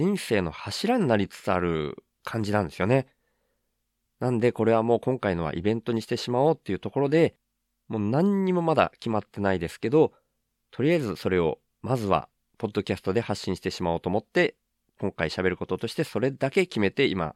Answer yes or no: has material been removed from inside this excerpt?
yes